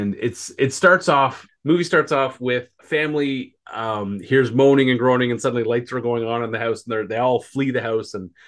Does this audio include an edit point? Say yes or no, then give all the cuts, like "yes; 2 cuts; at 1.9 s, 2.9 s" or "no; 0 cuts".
yes; 2 cuts; at 1.5 s, 2.8 s